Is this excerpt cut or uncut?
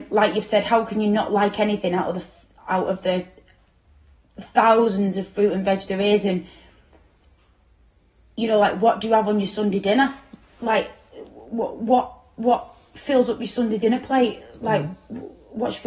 uncut